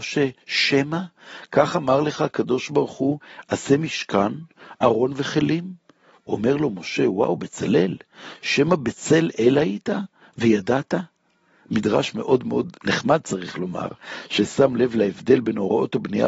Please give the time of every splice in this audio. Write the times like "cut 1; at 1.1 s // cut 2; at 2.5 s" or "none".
cut 1; at 12.8 s